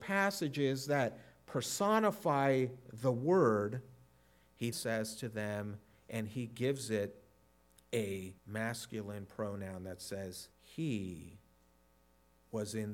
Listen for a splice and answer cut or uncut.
cut